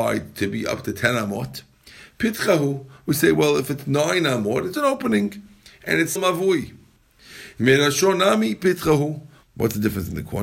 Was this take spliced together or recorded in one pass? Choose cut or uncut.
cut